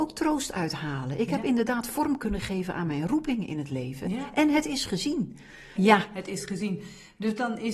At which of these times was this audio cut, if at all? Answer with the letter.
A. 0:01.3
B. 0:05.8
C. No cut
B